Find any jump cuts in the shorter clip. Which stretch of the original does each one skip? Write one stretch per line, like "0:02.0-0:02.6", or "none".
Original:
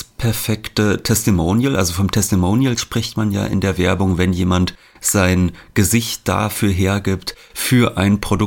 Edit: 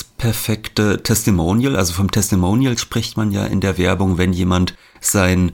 none